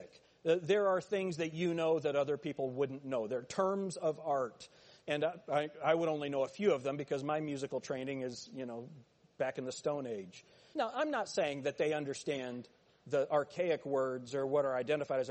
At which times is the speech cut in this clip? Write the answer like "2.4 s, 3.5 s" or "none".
10.7 s